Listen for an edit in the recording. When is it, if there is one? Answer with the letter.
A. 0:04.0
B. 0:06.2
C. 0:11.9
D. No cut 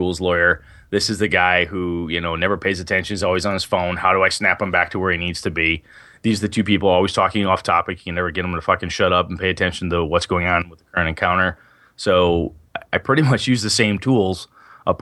D